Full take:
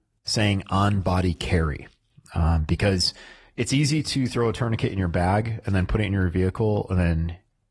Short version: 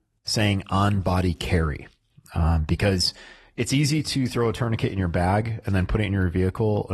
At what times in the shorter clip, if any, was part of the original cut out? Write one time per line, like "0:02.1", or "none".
none